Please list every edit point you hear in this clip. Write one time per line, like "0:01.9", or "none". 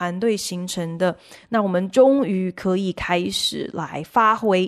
0:01.4